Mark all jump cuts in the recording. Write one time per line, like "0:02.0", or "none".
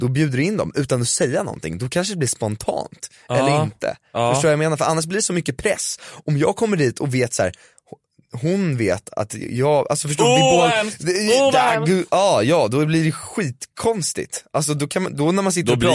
none